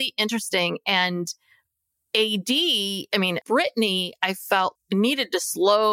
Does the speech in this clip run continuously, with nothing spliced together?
no; 2 cuts; at 3.4 s, 4.7 s

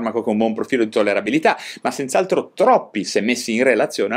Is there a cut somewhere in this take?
no; 0 cuts

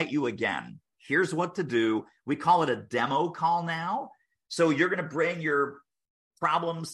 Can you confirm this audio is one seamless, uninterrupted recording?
no; 1 cut; at 0.9 s

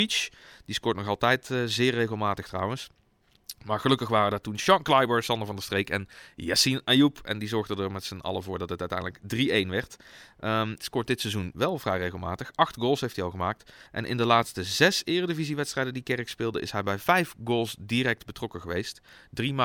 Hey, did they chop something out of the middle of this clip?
yes; 2 cuts; at 10.8 s, 13.9 s

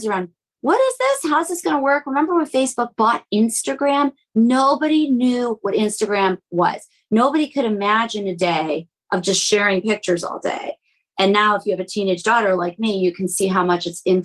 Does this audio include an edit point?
no; 0 cuts

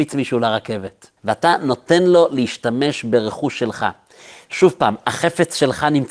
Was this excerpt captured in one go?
no; 1 cut; at 1.2 s

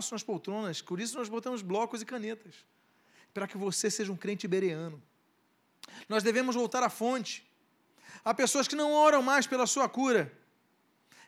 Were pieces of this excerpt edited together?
no; 0 cuts

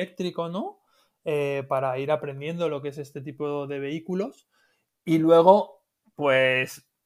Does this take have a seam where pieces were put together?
no; 0 cuts

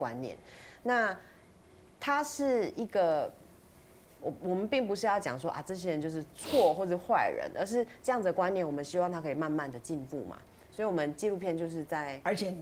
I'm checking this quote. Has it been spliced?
no; 0 cuts

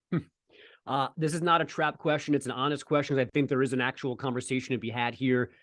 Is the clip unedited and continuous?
yes; 0 cuts

